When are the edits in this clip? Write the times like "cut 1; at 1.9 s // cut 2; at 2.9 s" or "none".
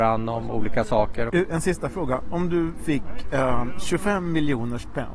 cut 1; at 1.3 s